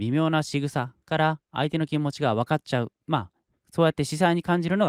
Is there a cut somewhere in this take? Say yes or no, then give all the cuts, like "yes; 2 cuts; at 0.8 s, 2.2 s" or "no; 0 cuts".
no; 0 cuts